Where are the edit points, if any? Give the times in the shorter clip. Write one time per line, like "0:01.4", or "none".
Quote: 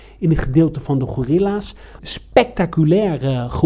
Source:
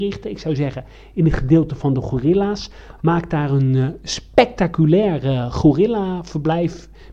0:02.0